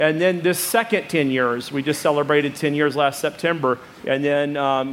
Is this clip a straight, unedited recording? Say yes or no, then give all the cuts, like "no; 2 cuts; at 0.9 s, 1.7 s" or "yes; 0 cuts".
no; 1 cut; at 4.0 s